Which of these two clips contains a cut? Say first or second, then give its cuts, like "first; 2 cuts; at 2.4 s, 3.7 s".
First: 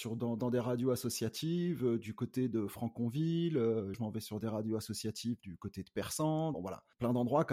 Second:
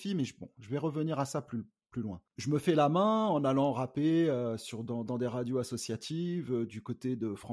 first; 2 cuts; at 3.9 s, 6.5 s